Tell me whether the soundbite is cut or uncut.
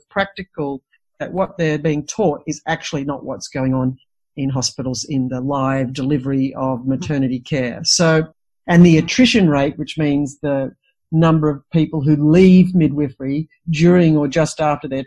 uncut